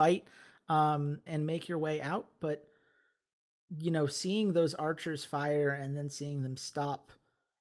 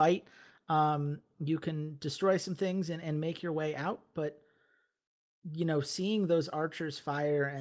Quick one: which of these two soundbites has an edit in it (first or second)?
first